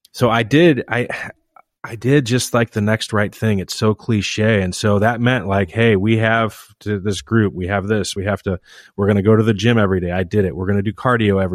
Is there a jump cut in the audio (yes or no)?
no